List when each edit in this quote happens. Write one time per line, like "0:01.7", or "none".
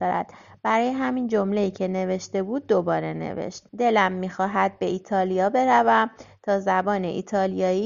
0:03.7